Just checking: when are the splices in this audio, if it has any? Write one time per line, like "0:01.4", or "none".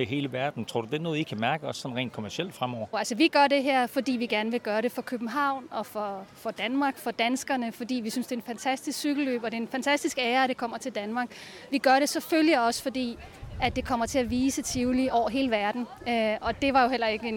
0:02.9